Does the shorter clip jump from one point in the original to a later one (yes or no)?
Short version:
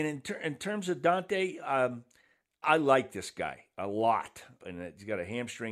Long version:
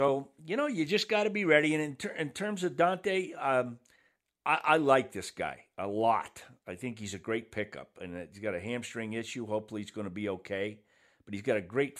yes